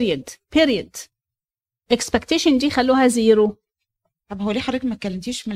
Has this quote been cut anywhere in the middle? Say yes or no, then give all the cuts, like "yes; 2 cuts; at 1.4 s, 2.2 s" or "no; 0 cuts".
no; 0 cuts